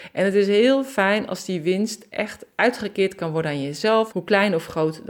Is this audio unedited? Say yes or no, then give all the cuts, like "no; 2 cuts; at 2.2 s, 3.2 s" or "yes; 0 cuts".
no; 1 cut; at 4.1 s